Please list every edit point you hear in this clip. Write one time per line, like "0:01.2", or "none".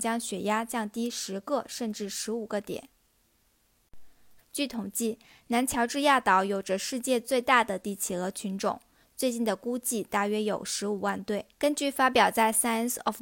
0:04.4
0:11.6